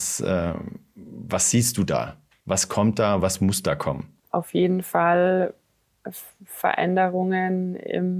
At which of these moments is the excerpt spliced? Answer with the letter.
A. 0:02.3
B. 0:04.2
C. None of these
B